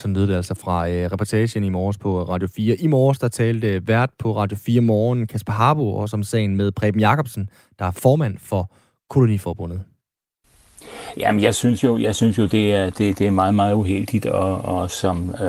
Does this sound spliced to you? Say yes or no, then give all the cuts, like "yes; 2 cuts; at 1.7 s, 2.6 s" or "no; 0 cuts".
no; 0 cuts